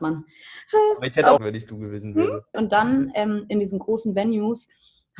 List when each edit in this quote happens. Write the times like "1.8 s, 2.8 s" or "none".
1.4 s, 2.5 s